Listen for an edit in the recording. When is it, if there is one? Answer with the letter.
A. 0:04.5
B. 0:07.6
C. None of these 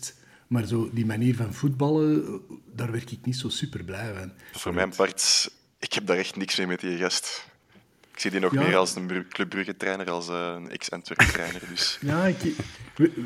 A